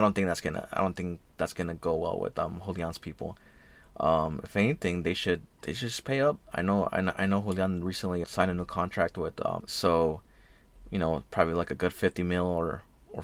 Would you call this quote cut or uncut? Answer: cut